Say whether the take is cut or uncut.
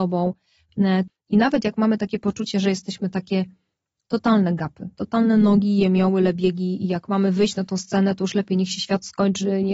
cut